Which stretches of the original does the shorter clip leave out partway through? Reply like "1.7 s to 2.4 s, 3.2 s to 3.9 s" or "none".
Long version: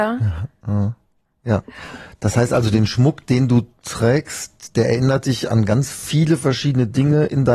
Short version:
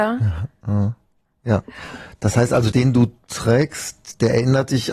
2.7 s to 3.3 s